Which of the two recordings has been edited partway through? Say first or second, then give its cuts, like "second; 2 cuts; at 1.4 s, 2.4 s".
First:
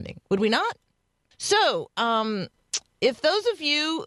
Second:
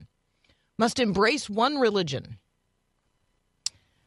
first; 1 cut; at 1.3 s